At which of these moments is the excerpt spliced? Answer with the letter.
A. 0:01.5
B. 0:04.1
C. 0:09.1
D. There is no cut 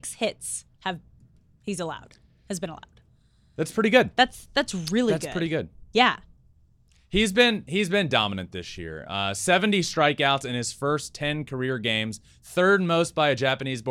D